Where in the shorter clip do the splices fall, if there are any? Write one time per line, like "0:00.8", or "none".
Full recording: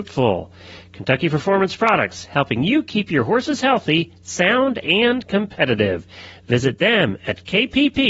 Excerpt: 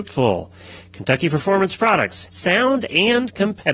0:02.3